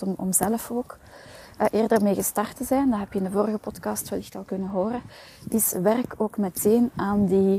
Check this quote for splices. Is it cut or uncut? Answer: uncut